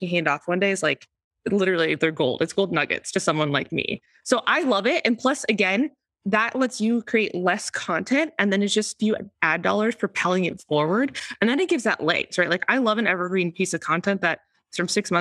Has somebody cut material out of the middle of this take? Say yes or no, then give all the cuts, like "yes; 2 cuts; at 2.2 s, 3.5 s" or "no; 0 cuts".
no; 0 cuts